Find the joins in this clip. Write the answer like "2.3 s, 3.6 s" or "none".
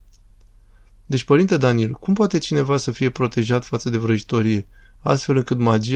none